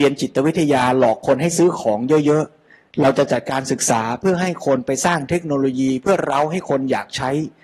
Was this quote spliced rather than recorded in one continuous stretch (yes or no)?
no